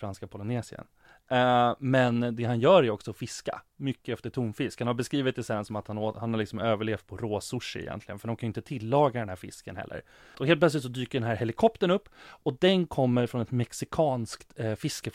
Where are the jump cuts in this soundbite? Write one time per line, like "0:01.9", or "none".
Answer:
0:10.3